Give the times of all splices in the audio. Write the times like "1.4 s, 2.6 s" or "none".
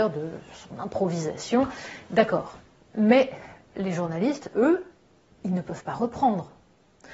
none